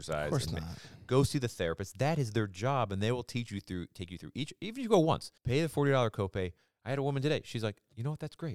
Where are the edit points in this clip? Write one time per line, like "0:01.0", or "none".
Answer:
0:05.4